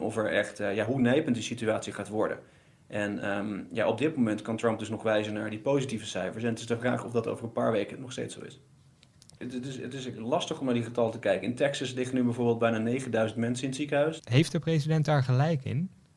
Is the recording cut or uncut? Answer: cut